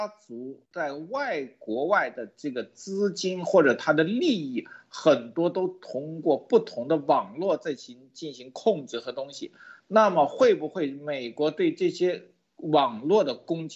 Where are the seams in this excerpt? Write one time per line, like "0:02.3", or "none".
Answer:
none

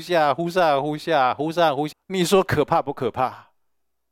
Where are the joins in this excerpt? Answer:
0:01.9

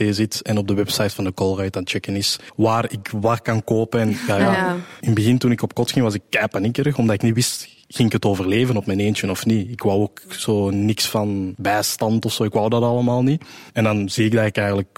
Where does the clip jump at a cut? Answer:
none

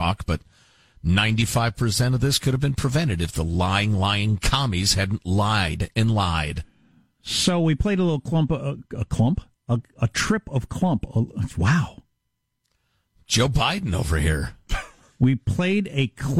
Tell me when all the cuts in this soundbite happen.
none

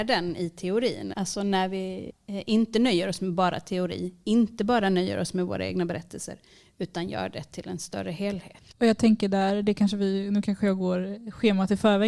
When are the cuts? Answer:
0:01.1
0:08.7

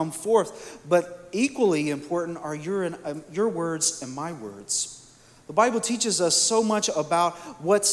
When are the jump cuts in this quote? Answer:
none

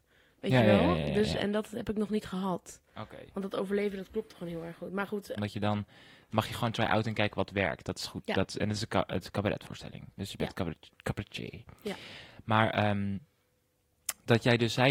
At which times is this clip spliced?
0:05.4
0:10.9

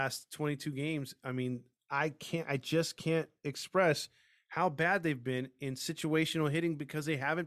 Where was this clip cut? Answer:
none

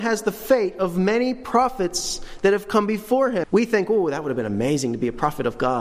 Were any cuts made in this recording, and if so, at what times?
0:03.4

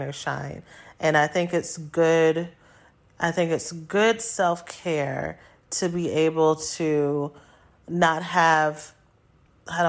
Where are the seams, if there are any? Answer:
none

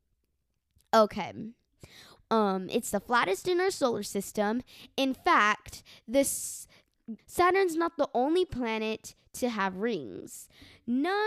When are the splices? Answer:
0:02.2
0:07.2

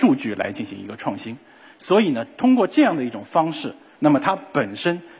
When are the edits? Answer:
0:04.0

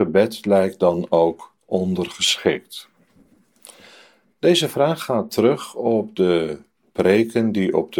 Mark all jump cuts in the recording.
none

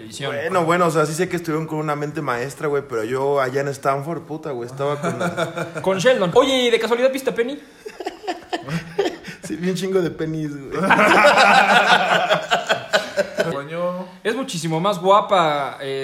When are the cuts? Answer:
0:06.3
0:13.5

